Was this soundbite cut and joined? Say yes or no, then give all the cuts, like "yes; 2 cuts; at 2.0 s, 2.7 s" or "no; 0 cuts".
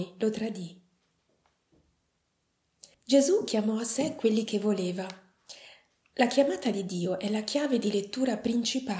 yes; 1 cut; at 2.9 s